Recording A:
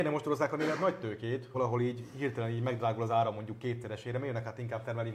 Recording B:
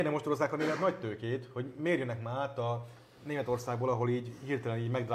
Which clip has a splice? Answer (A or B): A